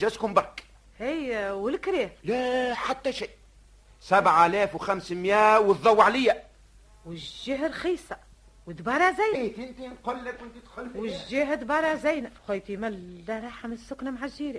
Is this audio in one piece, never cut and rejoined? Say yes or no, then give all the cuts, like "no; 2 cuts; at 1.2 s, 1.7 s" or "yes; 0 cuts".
no; 2 cuts; at 9.4 s, 12.4 s